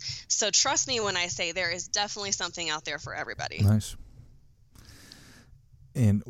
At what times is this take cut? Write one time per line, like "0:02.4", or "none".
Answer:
none